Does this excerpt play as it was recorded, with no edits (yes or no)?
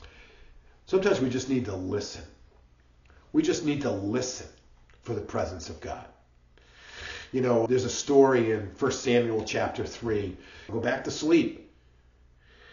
no